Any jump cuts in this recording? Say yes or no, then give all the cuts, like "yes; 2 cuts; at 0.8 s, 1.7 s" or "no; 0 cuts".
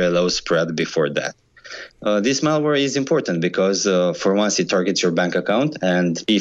yes; 1 cut; at 1.9 s